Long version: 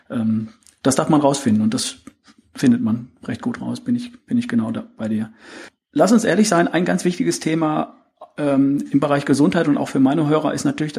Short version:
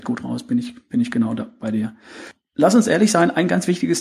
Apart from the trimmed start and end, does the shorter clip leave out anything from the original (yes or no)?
no